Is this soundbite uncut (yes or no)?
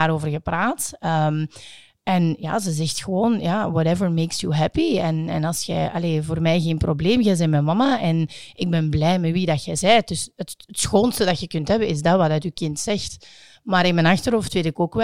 yes